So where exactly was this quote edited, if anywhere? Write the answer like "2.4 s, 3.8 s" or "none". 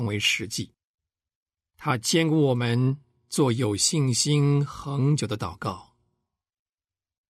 none